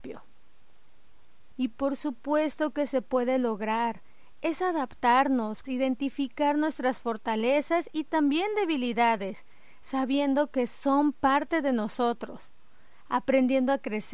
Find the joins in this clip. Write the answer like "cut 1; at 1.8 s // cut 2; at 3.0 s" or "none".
cut 1; at 1.5 s // cut 2; at 5.6 s